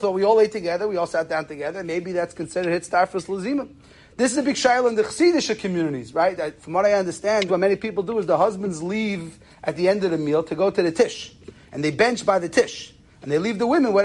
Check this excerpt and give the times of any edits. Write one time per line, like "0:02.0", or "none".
0:07.5